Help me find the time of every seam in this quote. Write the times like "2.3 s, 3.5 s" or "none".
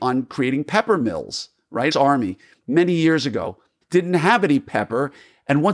1.9 s, 3.8 s